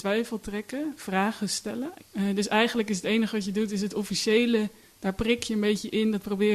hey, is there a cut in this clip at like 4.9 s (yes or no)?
no